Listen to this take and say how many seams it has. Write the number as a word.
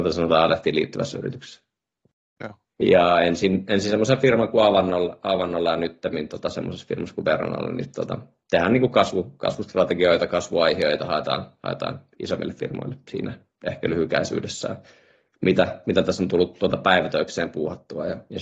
one